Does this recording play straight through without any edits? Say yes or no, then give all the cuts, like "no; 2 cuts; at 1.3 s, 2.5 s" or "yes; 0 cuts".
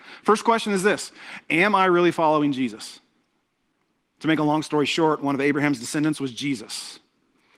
no; 1 cut; at 4.2 s